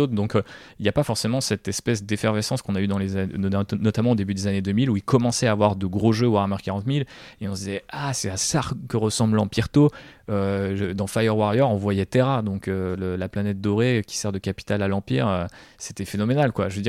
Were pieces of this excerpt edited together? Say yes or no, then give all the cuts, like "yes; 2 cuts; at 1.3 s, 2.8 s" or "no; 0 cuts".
no; 0 cuts